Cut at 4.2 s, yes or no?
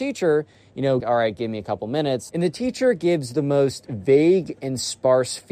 no